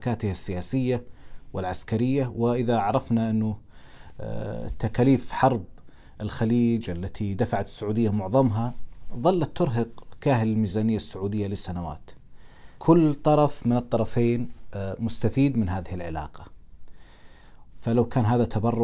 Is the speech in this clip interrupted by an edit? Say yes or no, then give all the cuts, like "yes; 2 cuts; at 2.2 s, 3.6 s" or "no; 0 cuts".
yes; 2 cuts; at 12.8 s, 17.7 s